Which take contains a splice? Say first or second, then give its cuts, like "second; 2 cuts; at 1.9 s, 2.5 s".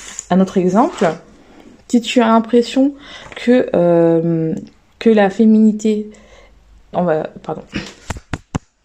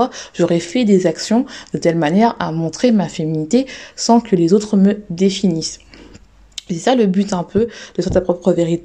first; 1 cut; at 6.9 s